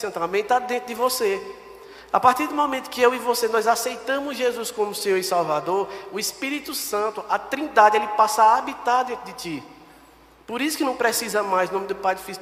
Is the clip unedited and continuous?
yes; 0 cuts

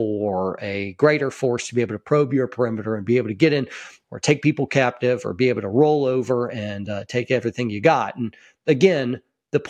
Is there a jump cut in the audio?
no; 0 cuts

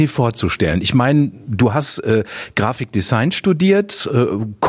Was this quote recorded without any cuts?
yes; 0 cuts

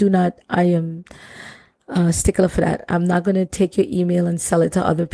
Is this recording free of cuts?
yes; 0 cuts

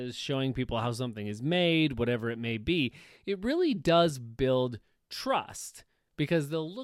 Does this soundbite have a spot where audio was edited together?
no; 0 cuts

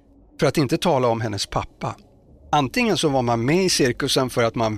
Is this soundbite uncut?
no; 1 cut; at 2.5 s

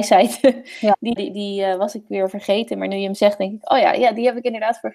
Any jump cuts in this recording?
yes; 1 cut; at 1.2 s

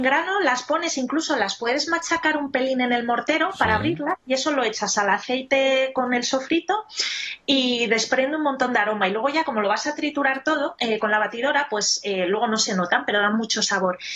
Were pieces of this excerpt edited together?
no; 0 cuts

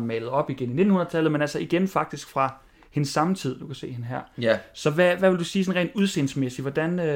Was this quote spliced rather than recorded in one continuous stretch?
no; 0 cuts

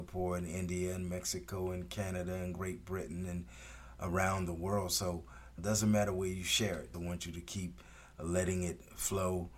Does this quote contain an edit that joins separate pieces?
yes; 2 cuts; at 5.6 s, 6.9 s

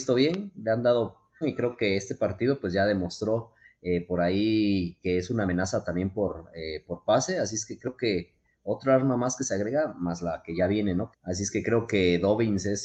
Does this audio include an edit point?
yes; 2 cuts; at 1.4 s, 11.1 s

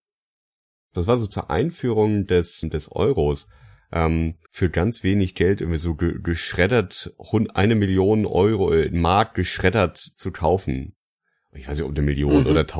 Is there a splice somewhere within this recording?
yes; 2 cuts; at 2.6 s, 4.5 s

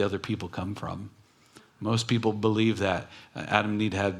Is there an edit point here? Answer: no; 0 cuts

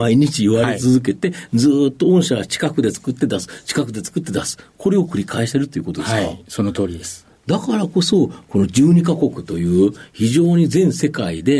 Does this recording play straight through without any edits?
yes; 0 cuts

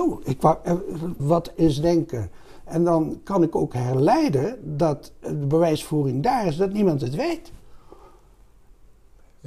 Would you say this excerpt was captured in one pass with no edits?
no; 1 cut; at 1.2 s

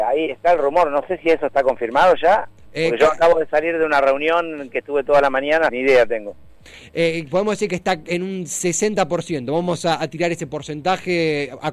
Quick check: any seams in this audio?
yes; 1 cut; at 5.7 s

